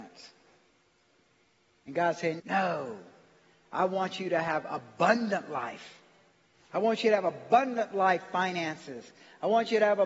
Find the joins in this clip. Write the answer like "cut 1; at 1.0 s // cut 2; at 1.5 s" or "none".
cut 1; at 2.4 s // cut 2; at 6.7 s